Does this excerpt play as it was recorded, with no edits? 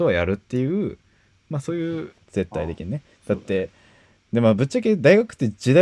no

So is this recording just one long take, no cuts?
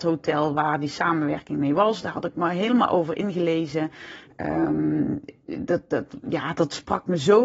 yes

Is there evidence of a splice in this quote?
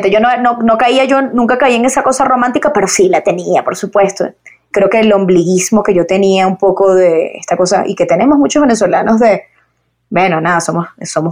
yes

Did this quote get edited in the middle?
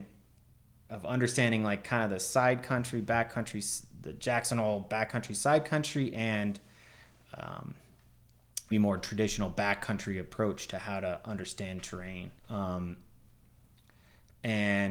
yes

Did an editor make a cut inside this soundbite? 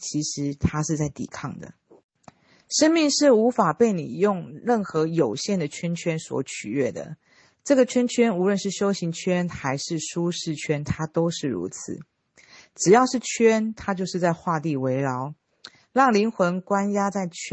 no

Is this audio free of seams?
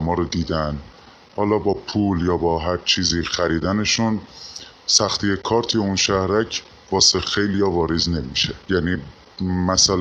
no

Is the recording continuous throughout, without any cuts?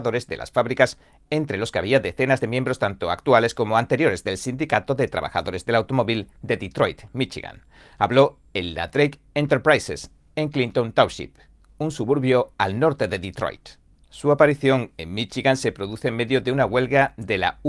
yes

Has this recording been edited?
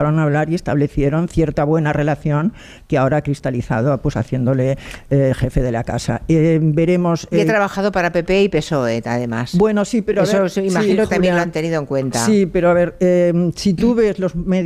no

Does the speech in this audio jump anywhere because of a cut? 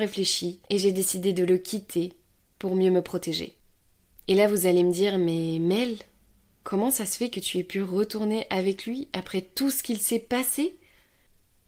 no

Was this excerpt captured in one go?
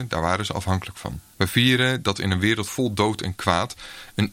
no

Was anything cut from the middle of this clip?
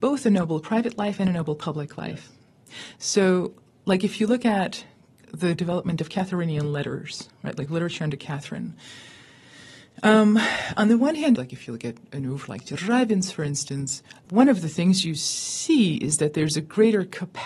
yes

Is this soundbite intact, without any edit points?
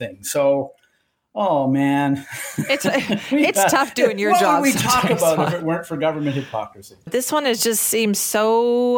no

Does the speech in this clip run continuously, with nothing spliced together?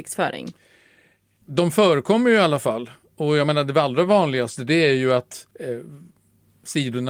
no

